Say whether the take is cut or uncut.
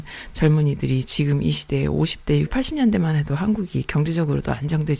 cut